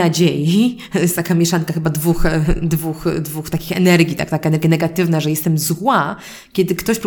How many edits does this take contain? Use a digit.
0